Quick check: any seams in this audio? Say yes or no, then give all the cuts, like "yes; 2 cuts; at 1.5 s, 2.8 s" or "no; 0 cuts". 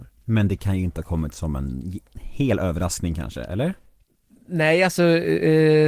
no; 0 cuts